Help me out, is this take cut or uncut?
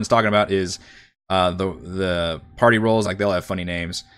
cut